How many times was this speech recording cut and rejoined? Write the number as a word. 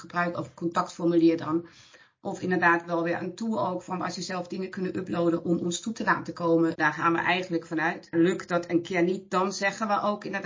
one